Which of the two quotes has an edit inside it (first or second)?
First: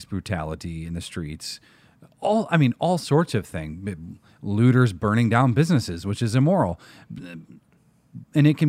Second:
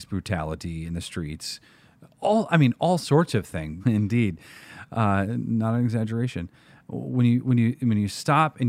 second